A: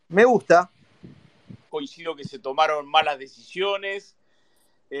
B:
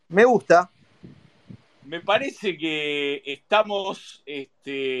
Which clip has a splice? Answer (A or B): A